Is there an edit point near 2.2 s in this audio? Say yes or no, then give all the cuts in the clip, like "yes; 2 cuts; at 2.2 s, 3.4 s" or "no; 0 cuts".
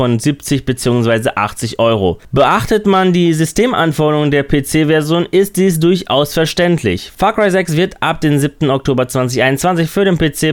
yes; 1 cut; at 2.2 s